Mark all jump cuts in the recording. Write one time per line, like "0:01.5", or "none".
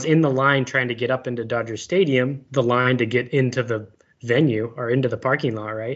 0:02.5